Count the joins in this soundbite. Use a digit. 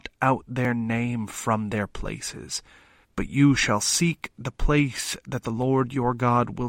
1